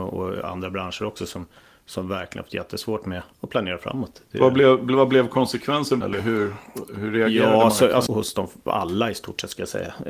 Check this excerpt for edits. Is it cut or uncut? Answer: cut